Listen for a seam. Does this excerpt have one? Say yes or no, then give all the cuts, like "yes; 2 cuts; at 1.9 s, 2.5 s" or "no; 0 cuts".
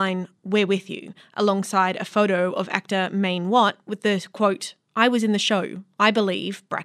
no; 0 cuts